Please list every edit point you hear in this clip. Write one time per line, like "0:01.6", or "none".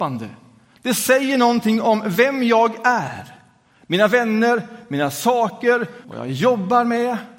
0:06.0